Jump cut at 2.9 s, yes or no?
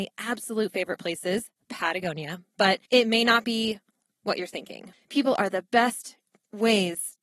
yes